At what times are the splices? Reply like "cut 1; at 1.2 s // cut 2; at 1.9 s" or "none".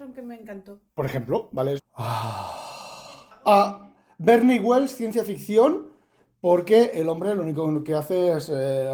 cut 1; at 1.8 s

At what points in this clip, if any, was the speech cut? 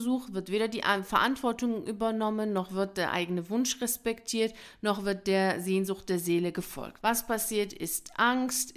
cut 1; at 7.0 s

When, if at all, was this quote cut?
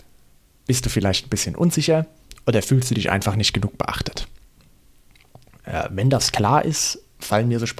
none

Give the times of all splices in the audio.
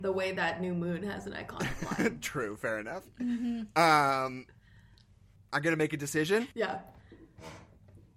cut 1; at 5.4 s // cut 2; at 6.5 s

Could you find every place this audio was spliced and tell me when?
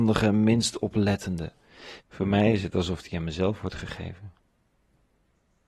cut 1; at 2.0 s

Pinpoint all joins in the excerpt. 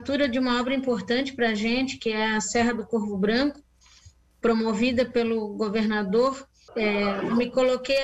cut 1; at 6.7 s

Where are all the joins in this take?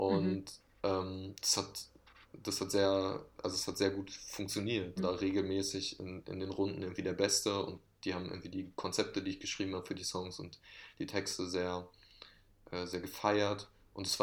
cut 1; at 5.0 s

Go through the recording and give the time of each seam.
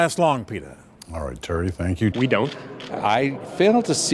cut 1; at 2.1 s

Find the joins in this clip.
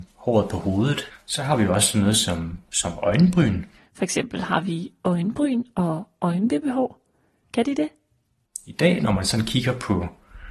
cut 1; at 1.1 s // cut 2; at 3.8 s // cut 3; at 7.4 s

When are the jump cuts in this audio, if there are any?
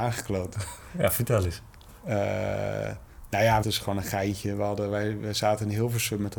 cut 1; at 3.6 s

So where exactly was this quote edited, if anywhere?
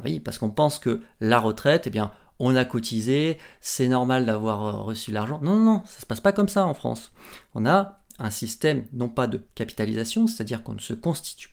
none

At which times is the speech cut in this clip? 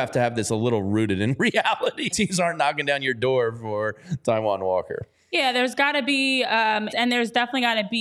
cut 1; at 2.1 s // cut 2; at 6.9 s

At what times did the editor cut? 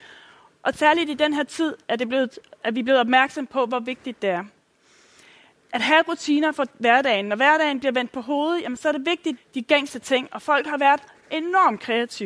cut 1; at 9.4 s

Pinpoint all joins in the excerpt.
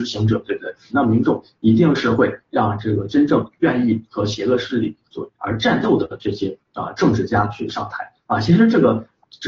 cut 1; at 0.9 s // cut 2; at 5.3 s

